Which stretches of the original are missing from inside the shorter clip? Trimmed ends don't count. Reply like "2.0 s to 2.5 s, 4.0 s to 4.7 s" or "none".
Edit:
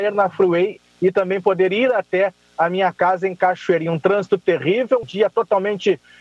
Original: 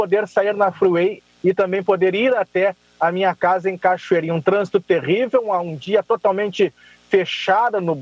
5.5 s to 5.8 s